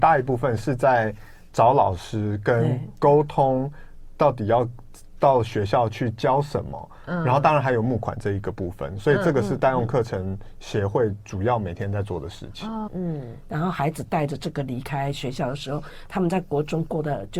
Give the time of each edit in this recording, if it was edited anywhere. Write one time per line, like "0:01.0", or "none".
0:12.9